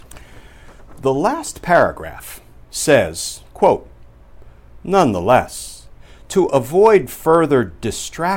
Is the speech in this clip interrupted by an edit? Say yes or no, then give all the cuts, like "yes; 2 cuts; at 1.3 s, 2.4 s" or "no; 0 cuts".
no; 0 cuts